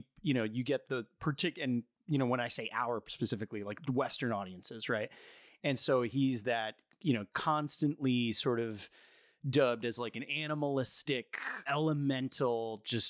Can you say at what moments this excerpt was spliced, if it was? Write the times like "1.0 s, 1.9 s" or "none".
11.7 s